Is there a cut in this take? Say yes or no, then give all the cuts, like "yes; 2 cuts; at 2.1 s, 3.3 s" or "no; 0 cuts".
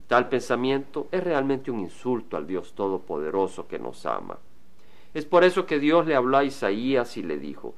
no; 0 cuts